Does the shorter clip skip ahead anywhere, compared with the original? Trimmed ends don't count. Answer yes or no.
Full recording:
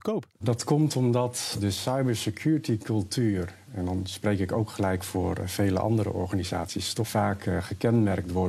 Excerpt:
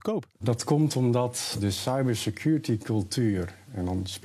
no